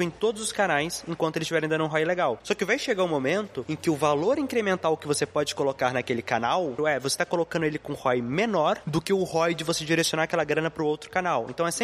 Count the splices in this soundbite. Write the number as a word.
one